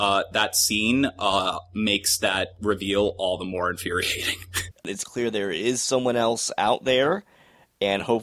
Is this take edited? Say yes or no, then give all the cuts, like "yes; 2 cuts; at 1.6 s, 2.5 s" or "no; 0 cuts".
yes; 1 cut; at 4.7 s